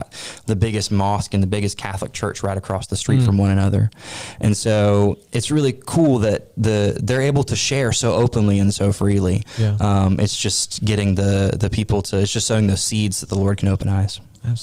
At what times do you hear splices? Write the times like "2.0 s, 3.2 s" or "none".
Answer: none